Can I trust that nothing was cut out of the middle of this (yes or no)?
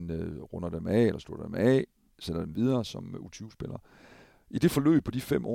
yes